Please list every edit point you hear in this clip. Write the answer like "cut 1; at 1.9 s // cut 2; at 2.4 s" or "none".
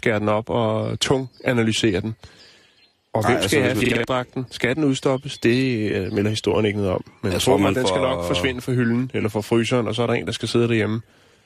none